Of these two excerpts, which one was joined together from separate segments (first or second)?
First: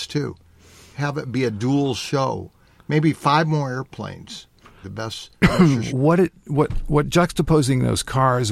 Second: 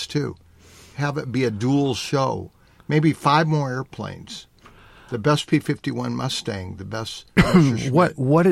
first